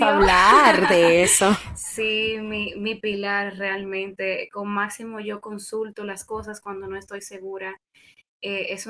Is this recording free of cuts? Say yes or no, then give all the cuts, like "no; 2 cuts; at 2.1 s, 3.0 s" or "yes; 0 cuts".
yes; 0 cuts